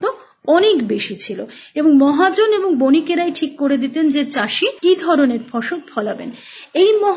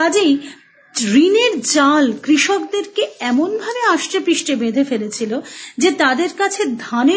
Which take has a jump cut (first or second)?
first